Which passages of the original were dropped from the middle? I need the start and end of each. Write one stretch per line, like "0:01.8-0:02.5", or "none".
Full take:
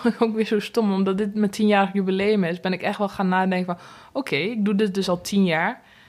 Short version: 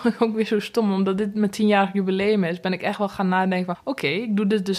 0:03.7-0:04.0